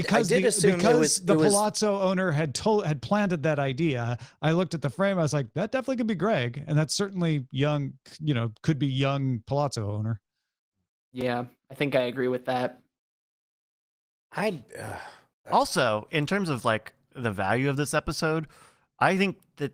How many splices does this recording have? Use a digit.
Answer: 1